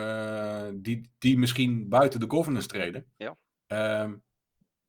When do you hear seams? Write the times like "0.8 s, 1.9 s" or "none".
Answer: 3.2 s